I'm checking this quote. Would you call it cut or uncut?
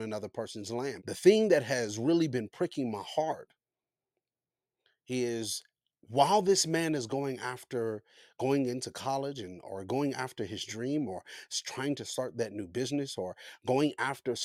cut